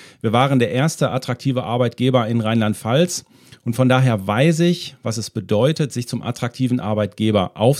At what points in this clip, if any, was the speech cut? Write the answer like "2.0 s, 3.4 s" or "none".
none